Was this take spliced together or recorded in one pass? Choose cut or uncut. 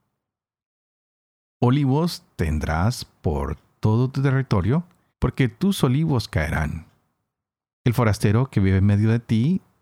cut